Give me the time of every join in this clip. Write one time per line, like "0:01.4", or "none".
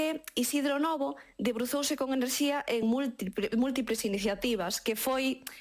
none